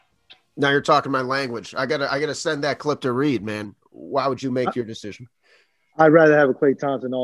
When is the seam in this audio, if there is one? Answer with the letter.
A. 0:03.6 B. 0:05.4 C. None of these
A